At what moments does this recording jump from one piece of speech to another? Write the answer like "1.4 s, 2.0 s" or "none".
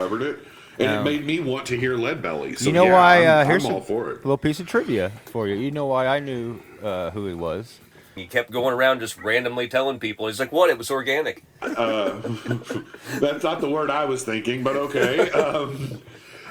8.2 s, 11.6 s